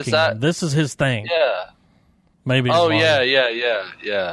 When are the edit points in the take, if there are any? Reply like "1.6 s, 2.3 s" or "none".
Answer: 2.3 s